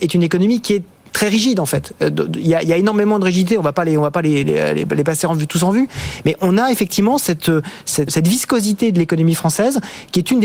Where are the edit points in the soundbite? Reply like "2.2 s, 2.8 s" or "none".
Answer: 4.4 s, 8.1 s